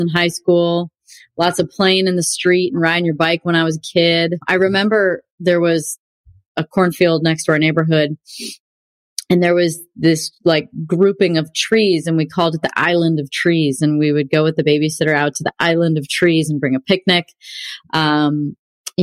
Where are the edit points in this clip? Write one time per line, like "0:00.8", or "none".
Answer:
none